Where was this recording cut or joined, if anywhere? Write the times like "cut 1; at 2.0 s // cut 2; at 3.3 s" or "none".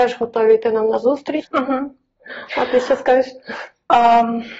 cut 1; at 1.4 s